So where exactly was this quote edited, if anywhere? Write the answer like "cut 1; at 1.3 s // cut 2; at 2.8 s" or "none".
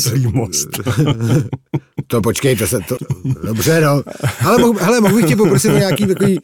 cut 1; at 3.0 s